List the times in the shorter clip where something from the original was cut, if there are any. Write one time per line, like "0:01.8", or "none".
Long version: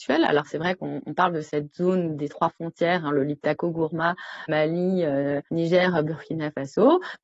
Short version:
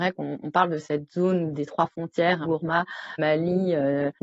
0:02.4